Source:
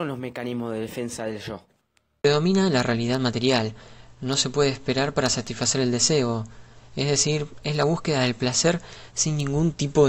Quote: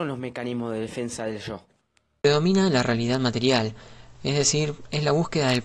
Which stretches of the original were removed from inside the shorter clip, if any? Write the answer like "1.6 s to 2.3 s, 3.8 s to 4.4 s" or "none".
4.1 s to 6.9 s